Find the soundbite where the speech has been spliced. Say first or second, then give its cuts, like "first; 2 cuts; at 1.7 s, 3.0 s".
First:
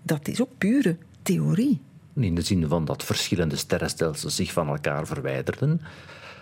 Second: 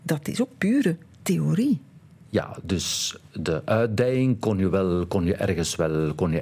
first; 1 cut; at 2.2 s